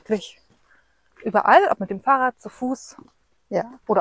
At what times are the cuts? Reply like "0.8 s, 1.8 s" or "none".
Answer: none